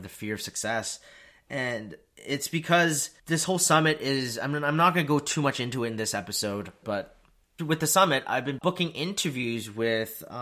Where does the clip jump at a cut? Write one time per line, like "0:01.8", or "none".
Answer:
0:06.8
0:08.6